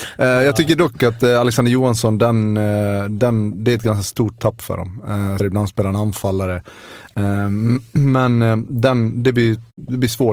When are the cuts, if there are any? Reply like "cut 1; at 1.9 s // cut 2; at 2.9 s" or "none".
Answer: cut 1; at 5.4 s